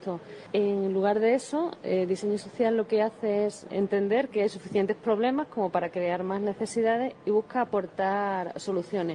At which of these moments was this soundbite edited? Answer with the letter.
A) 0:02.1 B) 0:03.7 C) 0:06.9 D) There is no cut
B